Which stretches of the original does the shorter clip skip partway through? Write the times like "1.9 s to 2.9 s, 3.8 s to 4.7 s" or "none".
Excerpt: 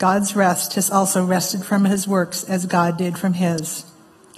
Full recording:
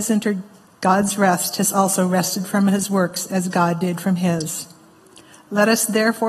none